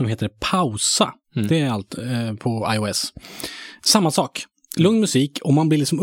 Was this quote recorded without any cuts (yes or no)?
no